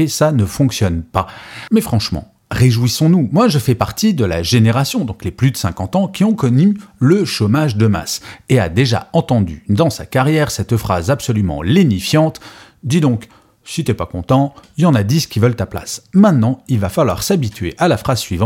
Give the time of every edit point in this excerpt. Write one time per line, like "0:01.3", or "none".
none